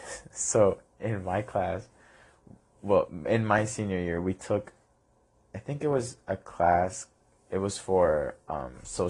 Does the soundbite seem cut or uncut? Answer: uncut